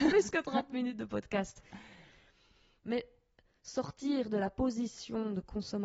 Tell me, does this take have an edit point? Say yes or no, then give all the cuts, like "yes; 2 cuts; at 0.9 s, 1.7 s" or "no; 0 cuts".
no; 0 cuts